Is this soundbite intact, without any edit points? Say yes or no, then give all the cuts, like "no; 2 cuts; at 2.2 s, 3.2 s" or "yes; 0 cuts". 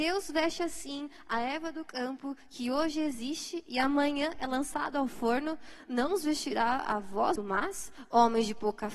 no; 1 cut; at 7.4 s